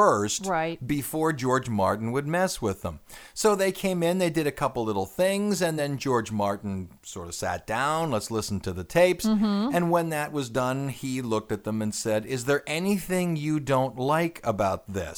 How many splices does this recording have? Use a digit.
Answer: 0